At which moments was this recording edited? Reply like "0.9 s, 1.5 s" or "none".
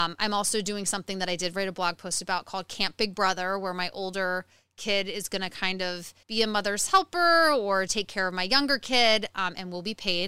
6.2 s, 7.9 s